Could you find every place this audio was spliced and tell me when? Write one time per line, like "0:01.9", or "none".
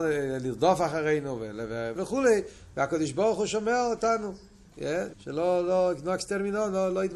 0:02.0
0:05.1